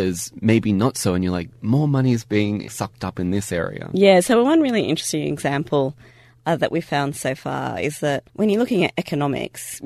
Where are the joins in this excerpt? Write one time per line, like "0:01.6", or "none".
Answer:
0:08.3